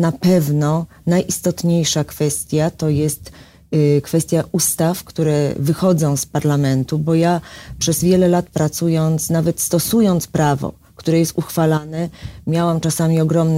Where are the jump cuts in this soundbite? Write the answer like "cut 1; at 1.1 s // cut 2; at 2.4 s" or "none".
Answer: none